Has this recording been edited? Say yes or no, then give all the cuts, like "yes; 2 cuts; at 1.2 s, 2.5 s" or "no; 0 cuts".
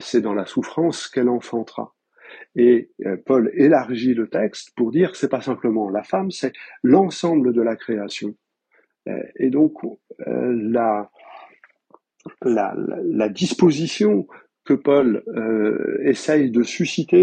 no; 0 cuts